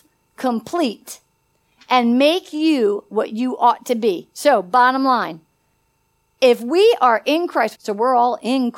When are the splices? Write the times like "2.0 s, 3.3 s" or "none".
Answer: 7.7 s